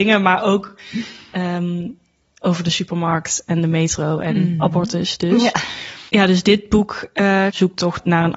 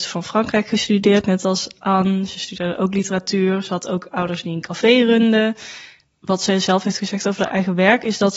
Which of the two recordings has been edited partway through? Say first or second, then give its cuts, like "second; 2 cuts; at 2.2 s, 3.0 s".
first; 2 cuts; at 6.1 s, 7.5 s